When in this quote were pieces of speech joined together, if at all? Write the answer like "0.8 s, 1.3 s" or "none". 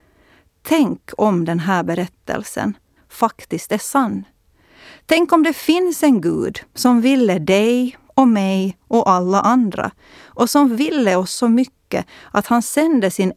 3.0 s